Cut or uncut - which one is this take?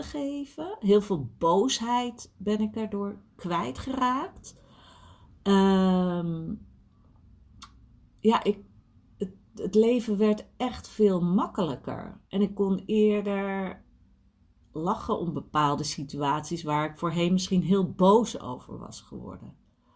uncut